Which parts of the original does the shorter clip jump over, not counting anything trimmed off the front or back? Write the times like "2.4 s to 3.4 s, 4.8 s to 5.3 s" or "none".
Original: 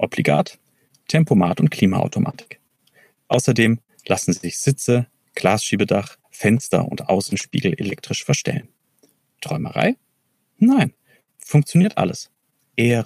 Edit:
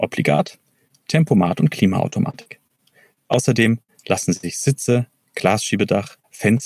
none